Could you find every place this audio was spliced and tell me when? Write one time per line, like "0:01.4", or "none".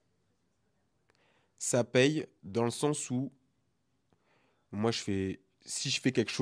none